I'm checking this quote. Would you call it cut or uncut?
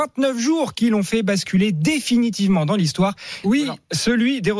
cut